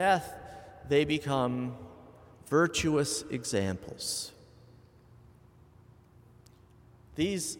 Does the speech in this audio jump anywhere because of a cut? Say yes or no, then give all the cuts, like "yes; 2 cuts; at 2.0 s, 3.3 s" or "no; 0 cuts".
no; 0 cuts